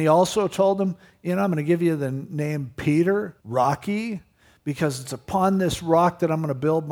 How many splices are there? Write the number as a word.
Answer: one